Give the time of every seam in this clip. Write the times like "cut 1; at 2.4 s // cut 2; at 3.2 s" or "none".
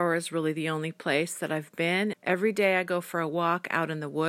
cut 1; at 2.1 s